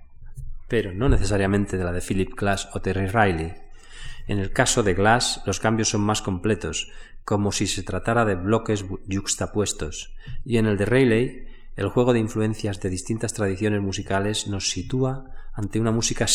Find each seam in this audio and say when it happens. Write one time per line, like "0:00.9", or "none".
none